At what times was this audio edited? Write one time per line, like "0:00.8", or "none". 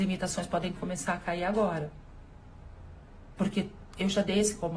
none